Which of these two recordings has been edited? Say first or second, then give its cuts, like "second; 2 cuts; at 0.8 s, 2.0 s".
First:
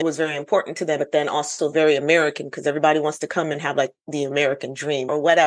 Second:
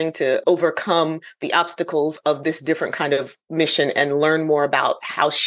first; 1 cut; at 1.0 s